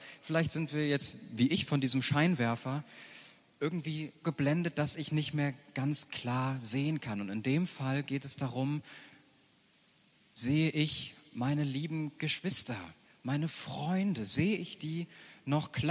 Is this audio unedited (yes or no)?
no